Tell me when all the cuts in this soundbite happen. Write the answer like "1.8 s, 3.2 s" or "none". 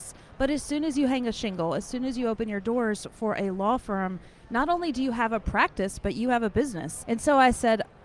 7.1 s